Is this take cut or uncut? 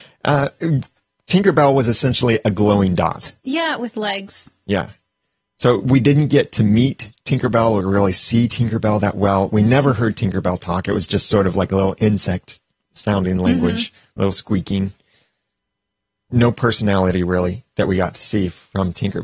uncut